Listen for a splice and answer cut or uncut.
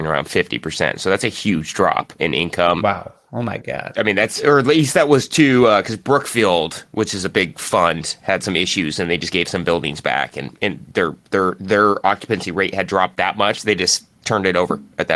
uncut